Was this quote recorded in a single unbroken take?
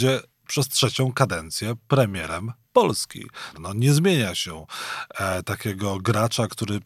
no; 1 cut; at 3.5 s

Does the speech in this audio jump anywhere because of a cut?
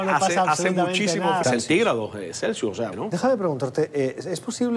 yes; 2 cuts; at 1.4 s, 2.9 s

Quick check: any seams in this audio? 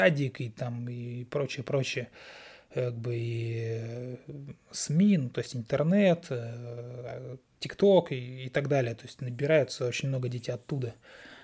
no; 0 cuts

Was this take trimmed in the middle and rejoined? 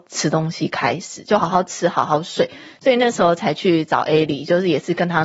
yes; 1 cut; at 1.4 s

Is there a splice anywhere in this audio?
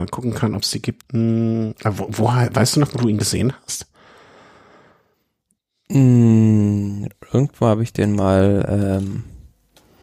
yes; 1 cut; at 1.0 s

